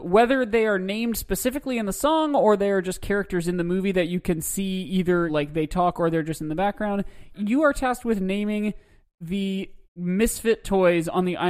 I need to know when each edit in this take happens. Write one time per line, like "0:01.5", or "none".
0:05.3
0:07.3
0:09.8